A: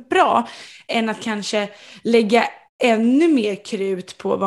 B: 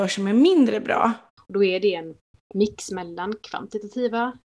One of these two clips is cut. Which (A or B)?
B